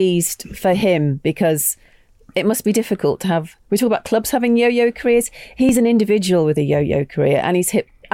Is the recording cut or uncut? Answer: uncut